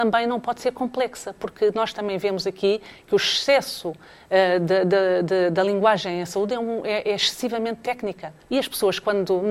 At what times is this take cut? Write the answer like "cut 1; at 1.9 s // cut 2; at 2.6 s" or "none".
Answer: cut 1; at 8.4 s